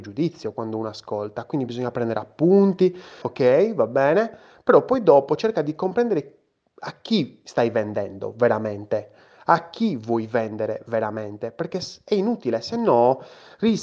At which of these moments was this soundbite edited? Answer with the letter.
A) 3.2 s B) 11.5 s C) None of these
A